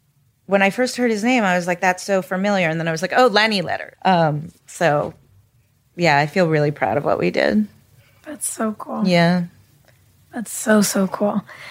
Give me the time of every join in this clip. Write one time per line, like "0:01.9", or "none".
0:03.9